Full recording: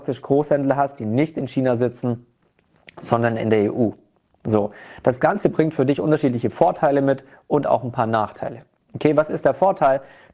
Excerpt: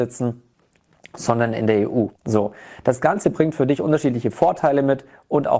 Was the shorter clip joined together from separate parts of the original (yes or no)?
yes